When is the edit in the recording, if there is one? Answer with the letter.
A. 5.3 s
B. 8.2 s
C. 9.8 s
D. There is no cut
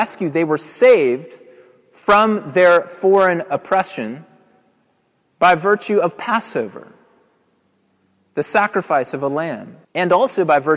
C